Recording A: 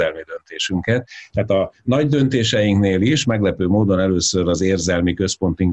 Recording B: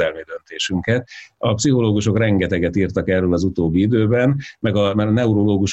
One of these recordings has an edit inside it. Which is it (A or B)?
A